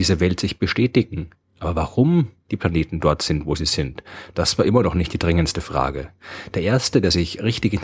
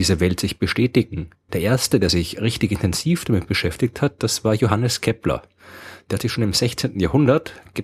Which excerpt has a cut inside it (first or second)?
second